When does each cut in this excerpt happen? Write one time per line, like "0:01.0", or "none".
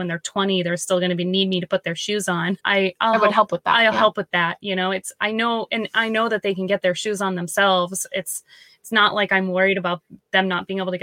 0:02.6